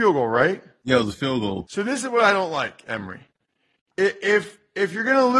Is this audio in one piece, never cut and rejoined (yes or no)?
yes